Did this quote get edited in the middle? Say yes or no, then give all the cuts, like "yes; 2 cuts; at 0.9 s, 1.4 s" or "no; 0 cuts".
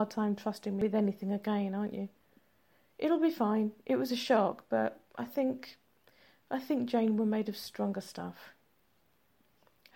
no; 0 cuts